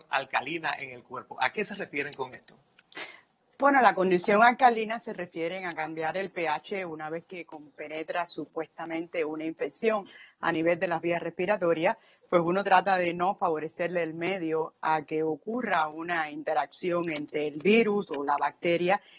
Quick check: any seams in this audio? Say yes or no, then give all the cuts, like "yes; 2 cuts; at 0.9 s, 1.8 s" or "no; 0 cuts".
no; 0 cuts